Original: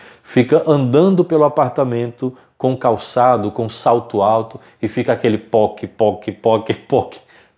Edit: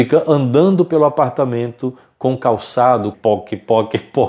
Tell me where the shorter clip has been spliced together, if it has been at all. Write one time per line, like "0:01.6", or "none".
0:03.1